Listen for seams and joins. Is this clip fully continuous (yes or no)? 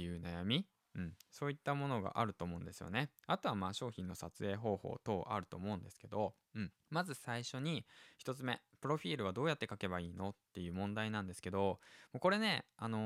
no